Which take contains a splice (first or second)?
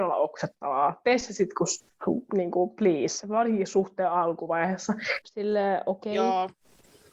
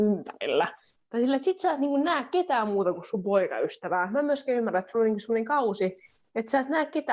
first